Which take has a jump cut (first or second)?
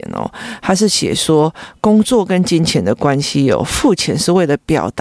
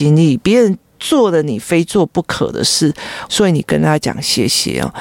second